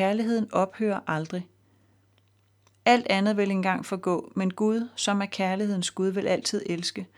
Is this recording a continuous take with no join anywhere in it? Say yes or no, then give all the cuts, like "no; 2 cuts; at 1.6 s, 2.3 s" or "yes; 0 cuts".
yes; 0 cuts